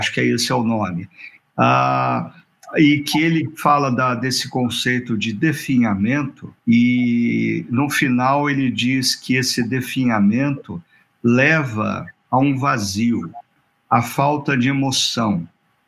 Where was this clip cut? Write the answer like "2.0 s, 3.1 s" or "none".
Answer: 6.6 s